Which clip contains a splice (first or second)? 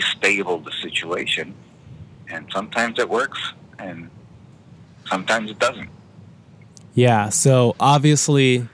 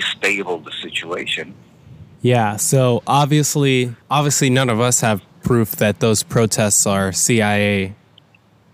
second